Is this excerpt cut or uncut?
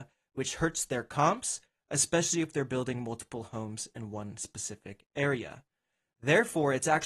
uncut